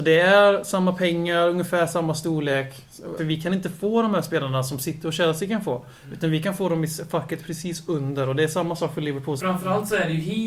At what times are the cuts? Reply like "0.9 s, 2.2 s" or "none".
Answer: 3.2 s, 9.4 s